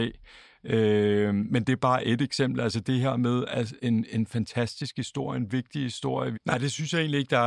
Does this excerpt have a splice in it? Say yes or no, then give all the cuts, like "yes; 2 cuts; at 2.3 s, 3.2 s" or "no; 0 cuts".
yes; 2 cuts; at 3.8 s, 6.3 s